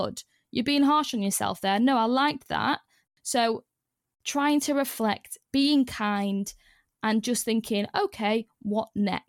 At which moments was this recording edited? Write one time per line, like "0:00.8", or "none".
0:03.1
0:05.5